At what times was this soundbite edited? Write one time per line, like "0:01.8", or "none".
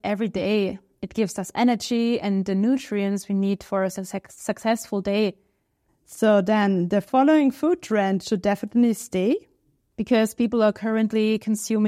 0:05.9
0:09.8